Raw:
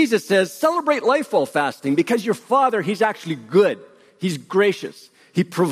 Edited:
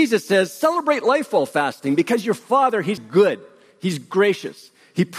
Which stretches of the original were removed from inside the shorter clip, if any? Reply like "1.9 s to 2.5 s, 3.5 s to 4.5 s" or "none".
3.0 s to 3.4 s